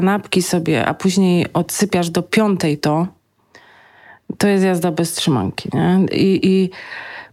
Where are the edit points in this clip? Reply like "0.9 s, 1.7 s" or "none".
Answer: none